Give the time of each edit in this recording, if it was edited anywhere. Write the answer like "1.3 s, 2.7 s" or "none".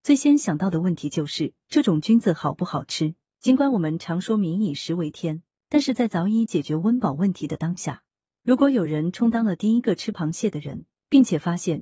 8.3 s

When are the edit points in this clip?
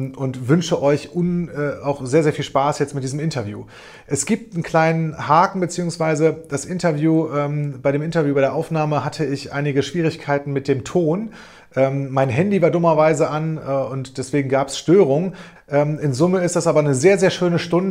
15.6 s

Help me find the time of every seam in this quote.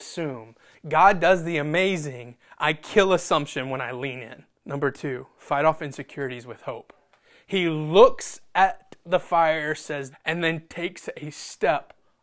4.5 s, 10.1 s

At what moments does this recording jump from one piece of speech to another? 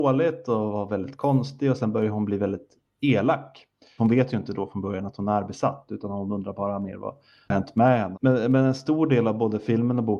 4.0 s, 8.1 s

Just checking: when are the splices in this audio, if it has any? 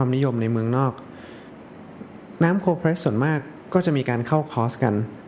none

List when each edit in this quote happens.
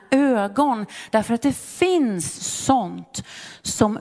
none

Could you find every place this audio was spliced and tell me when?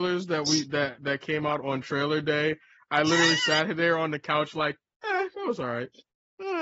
none

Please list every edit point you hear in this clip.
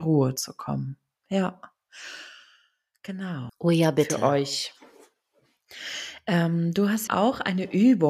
3.5 s, 7.1 s

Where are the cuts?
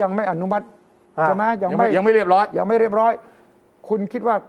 none

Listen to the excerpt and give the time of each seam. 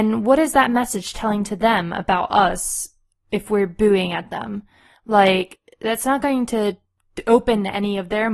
none

